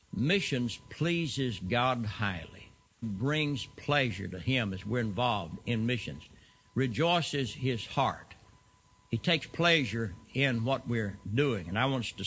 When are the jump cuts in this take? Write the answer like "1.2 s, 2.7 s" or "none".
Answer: 3.0 s

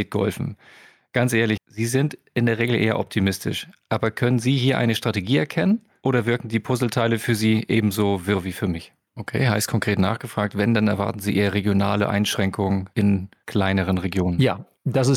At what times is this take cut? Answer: 1.6 s, 9.1 s

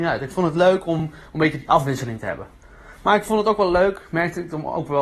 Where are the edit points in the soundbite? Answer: none

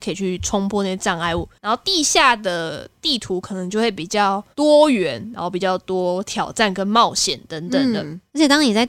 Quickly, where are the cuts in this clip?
1.6 s

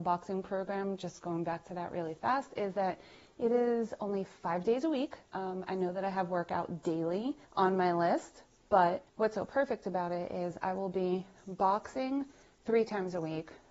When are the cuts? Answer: 5.3 s, 7.4 s, 9.1 s

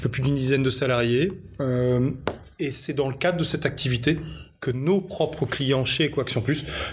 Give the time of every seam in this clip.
none

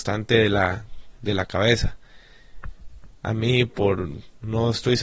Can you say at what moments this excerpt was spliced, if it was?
3.1 s

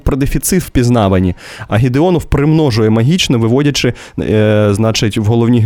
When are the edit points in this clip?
1.7 s

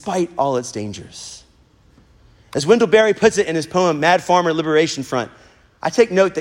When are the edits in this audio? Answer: none

